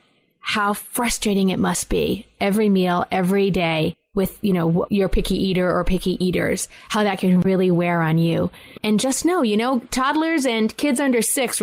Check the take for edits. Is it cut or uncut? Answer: uncut